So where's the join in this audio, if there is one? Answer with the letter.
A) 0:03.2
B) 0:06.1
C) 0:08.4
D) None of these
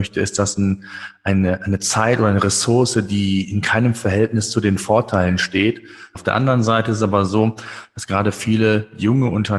B